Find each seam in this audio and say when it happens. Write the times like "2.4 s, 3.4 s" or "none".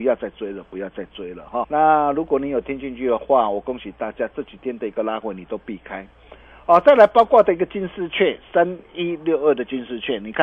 1.6 s